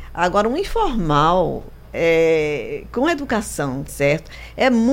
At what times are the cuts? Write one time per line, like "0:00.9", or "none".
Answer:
0:03.9